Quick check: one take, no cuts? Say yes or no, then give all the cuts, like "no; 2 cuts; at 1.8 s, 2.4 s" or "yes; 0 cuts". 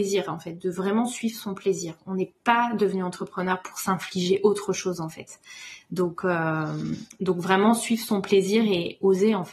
yes; 0 cuts